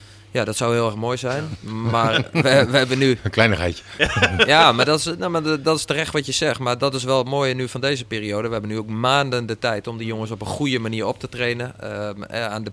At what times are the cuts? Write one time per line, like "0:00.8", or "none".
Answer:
none

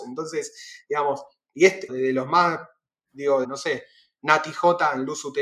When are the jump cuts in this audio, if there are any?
0:01.9
0:03.4

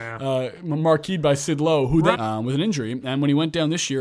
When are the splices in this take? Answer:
0:02.1

